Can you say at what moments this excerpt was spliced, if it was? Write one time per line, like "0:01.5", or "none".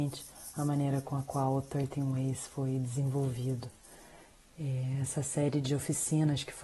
none